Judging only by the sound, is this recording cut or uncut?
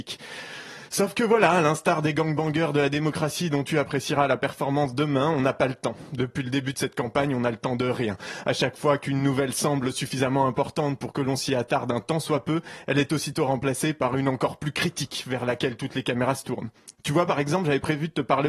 uncut